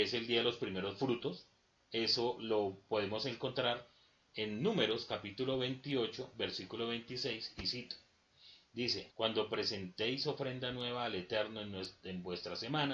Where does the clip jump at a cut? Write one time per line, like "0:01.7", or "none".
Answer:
0:09.1